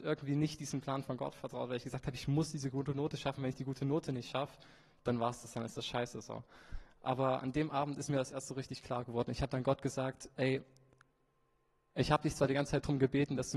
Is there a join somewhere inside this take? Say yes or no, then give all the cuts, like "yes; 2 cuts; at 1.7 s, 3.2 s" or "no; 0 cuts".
no; 0 cuts